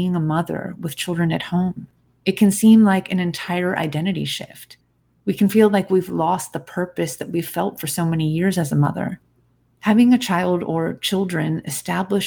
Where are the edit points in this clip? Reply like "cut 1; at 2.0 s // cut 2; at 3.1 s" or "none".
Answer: none